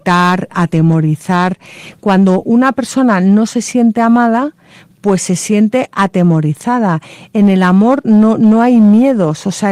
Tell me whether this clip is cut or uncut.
uncut